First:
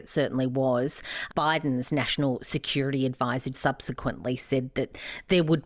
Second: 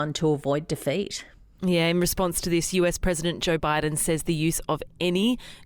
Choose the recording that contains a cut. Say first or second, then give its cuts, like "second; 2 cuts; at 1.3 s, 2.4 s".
first; 2 cuts; at 1.3 s, 3.5 s